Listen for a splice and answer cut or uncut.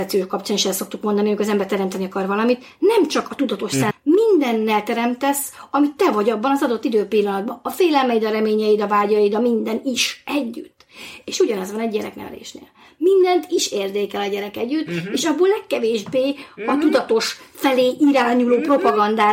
cut